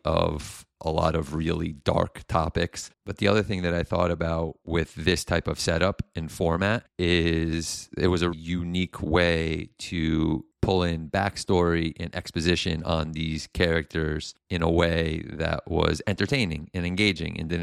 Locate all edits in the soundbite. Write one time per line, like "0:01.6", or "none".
0:02.9
0:08.3